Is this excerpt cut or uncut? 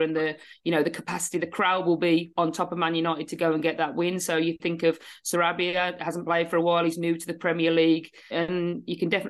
cut